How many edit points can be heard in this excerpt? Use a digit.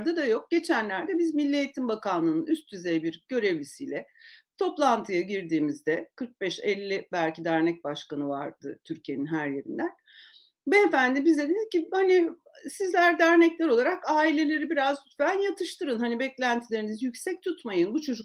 0